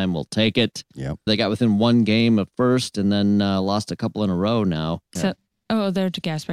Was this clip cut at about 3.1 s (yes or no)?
no